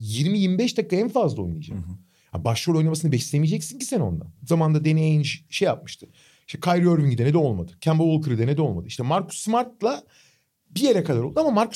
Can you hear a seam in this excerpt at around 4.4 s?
yes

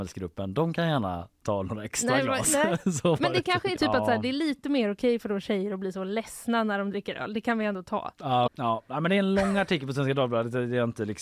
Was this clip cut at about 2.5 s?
no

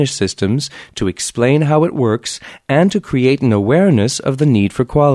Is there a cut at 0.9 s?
no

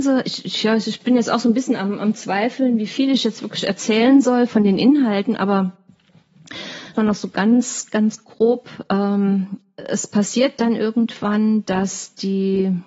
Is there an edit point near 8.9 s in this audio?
no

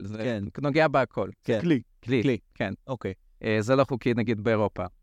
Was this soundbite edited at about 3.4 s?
yes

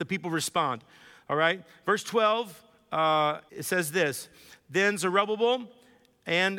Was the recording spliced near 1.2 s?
no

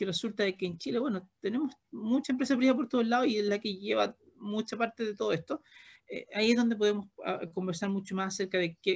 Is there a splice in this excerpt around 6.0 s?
yes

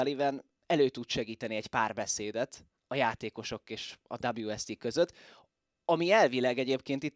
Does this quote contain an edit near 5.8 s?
no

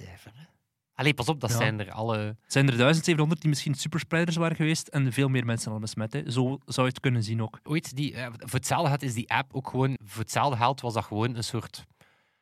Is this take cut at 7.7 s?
yes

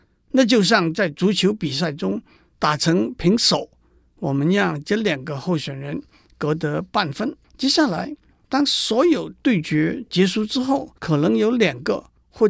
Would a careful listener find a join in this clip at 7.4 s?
yes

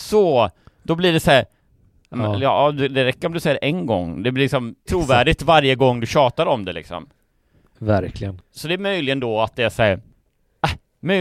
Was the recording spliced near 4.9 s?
yes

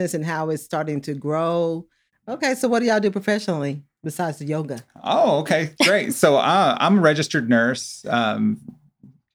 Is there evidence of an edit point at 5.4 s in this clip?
no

